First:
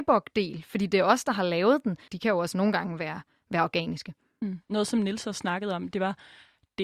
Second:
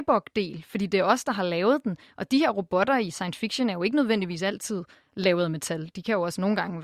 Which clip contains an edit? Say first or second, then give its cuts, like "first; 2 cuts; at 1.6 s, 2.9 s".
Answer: first; 1 cut; at 2.1 s